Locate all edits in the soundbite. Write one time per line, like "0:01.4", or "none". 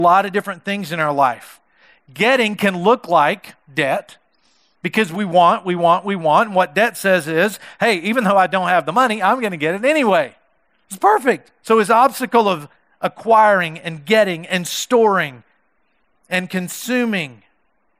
0:11.6